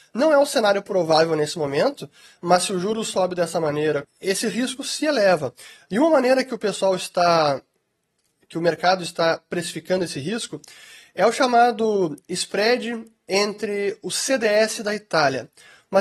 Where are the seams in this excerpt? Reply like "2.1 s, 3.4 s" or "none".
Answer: 4.0 s